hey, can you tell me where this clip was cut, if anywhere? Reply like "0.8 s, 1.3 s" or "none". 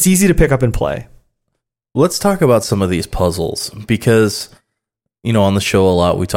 none